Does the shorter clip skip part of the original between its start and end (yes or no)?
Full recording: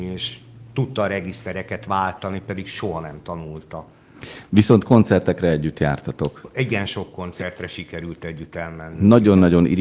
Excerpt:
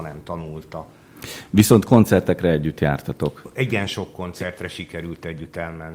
no